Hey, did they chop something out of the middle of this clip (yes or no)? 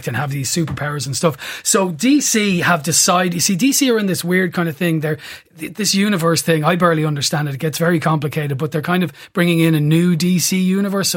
no